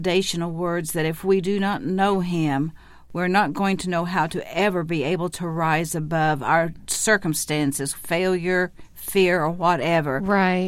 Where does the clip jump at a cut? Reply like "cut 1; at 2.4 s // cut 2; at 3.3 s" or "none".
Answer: cut 1; at 7.9 s